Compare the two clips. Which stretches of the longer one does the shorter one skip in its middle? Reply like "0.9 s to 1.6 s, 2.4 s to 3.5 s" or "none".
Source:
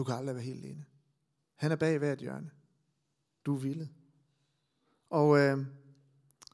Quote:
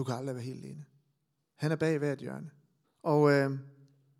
2.8 s to 4.9 s